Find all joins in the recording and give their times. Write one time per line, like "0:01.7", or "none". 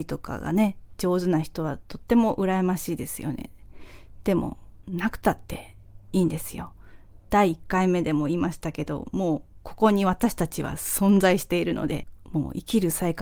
0:04.8

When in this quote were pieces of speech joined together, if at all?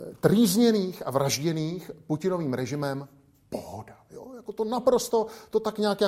none

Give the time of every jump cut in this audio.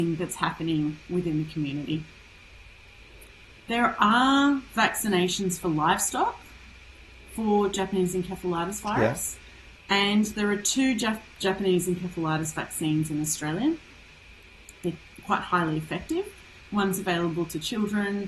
0:09.8

